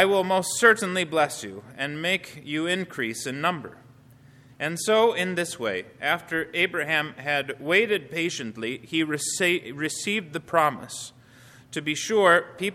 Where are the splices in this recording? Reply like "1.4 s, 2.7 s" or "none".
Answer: none